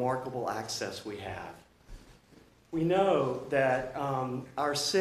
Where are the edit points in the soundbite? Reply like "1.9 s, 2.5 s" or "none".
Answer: none